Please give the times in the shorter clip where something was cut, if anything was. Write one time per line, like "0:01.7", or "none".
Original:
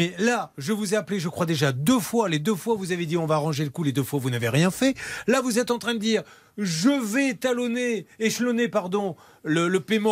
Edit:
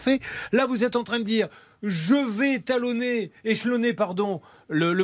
none